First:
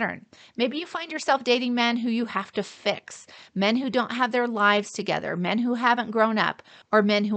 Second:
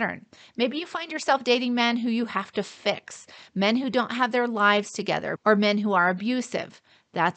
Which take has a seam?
second; 1 cut; at 5.4 s

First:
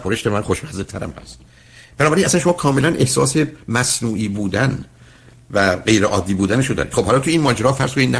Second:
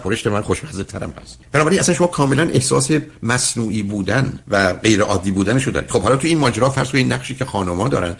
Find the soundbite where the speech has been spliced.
second; 2 cuts; at 1.4 s, 4.4 s

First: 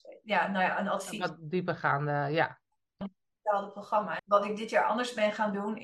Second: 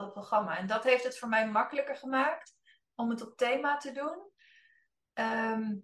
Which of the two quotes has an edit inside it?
first; 2 cuts; at 3.0 s, 4.2 s

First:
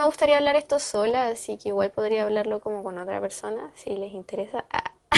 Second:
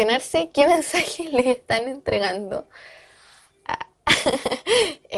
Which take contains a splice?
second; 1 cut; at 3.6 s

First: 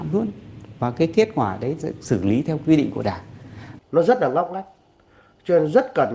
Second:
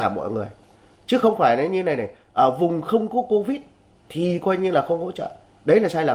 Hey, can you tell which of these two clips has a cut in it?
first; 2 cuts; at 1.8 s, 3.8 s

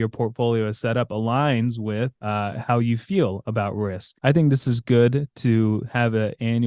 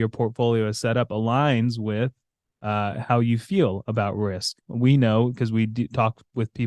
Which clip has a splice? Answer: first; 2 cuts; at 2.2 s, 4.2 s

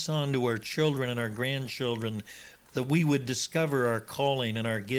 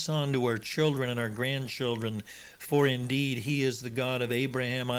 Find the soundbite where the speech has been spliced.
first; 1 cut; at 2.6 s

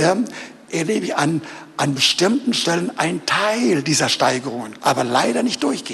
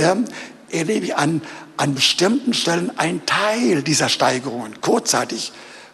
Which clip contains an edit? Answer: first; 1 cut; at 4.8 s

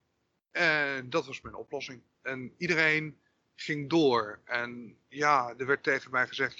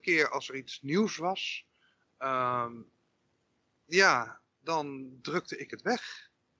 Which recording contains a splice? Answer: first; 1 cut; at 2.1 s

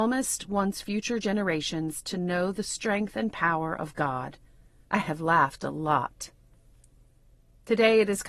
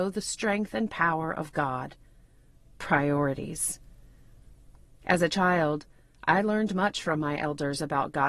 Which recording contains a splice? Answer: first; 1 cut; at 4.8 s

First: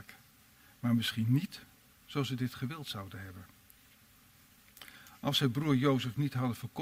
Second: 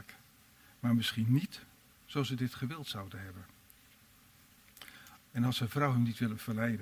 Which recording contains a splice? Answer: second; 1 cut; at 5.2 s

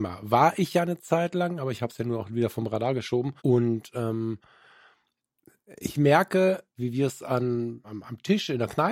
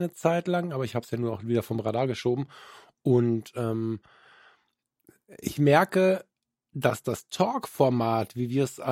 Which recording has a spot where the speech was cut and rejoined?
first; 3 cuts; at 3.4 s, 6.8 s, 7.8 s

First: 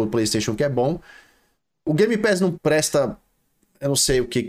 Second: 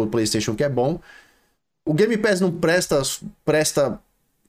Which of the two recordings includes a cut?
first; 1 cut; at 2.5 s

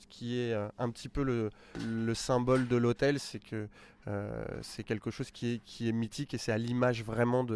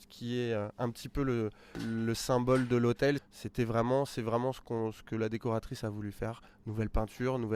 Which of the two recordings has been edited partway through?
second; 1 cut; at 3.2 s

